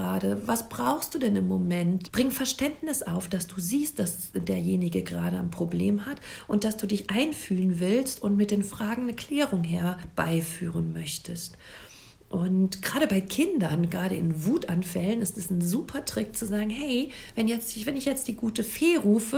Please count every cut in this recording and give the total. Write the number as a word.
one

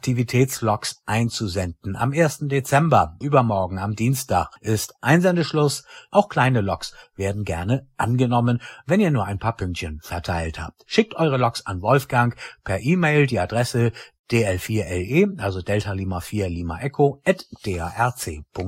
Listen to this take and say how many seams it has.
two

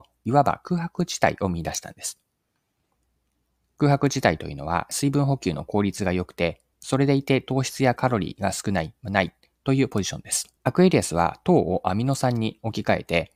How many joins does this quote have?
one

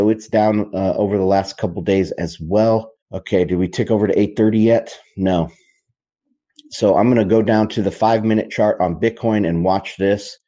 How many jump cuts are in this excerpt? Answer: one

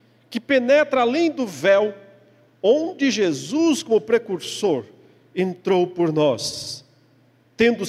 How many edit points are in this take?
zero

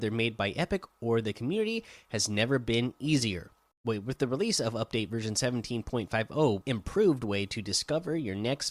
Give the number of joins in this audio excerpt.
two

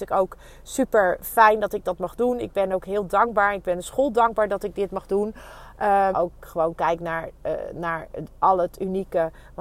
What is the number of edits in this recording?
one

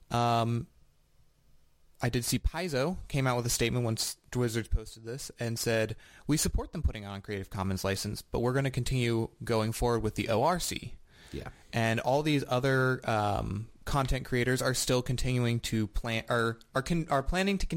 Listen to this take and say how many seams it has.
zero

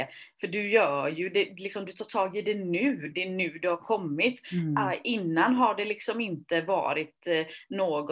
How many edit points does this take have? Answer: one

